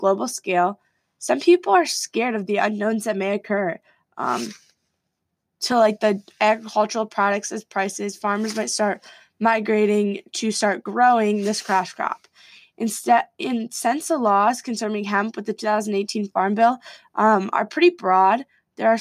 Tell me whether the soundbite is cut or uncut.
uncut